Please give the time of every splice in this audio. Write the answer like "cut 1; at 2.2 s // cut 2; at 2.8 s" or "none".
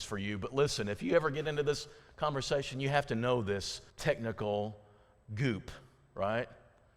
cut 1; at 3.9 s